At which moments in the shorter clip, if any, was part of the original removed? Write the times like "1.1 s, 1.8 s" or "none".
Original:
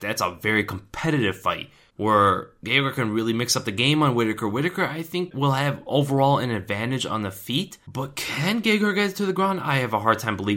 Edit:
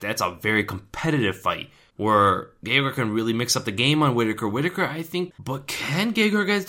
5.3 s